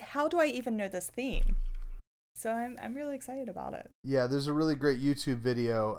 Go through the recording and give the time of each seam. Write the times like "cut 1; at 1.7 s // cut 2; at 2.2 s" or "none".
cut 1; at 2.2 s